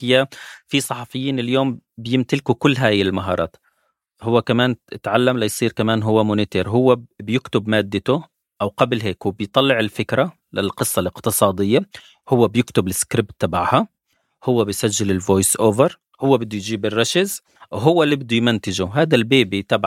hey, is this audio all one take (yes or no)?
yes